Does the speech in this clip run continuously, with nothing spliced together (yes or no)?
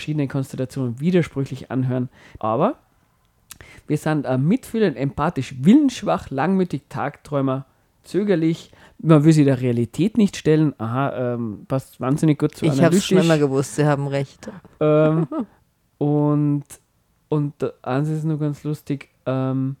no